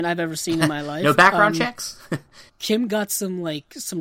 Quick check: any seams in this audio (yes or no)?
yes